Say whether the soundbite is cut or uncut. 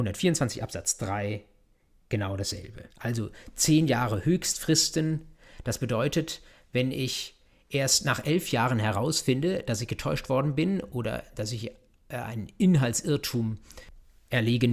cut